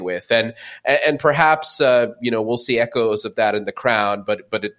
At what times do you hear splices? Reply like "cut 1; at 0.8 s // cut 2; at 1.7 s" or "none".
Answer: none